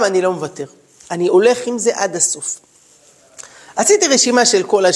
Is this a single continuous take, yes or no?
yes